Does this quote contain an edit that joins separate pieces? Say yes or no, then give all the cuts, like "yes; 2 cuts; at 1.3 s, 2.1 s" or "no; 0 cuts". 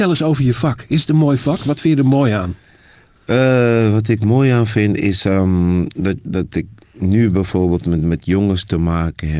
no; 0 cuts